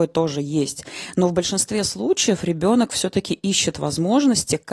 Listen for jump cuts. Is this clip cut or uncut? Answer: uncut